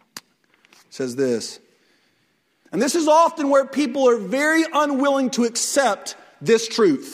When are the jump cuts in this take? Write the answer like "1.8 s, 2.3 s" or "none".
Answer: 2.6 s